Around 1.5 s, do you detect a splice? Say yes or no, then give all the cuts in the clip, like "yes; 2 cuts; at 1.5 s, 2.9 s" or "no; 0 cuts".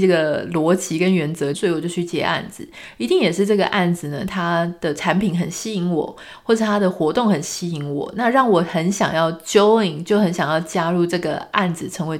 yes; 1 cut; at 1.5 s